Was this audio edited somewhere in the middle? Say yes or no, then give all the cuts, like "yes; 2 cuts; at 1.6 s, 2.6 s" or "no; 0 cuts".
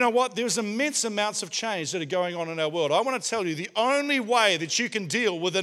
no; 0 cuts